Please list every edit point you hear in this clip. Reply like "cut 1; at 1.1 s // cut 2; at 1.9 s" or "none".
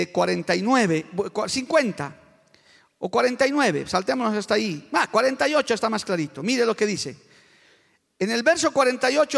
none

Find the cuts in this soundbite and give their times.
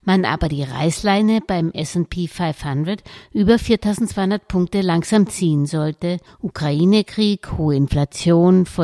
cut 1; at 6.3 s

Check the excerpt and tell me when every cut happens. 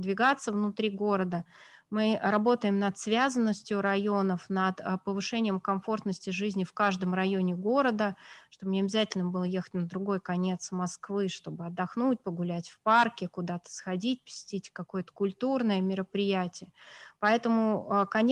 cut 1; at 17.1 s

